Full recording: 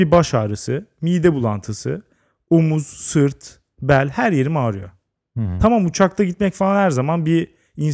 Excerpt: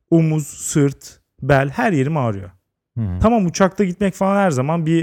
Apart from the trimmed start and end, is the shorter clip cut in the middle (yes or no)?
no